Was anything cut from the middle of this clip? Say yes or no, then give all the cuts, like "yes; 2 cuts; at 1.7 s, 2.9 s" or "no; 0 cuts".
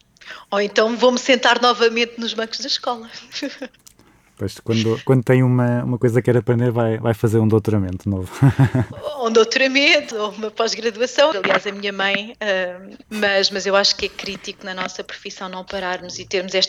yes; 3 cuts; at 10.1 s, 11.3 s, 13.1 s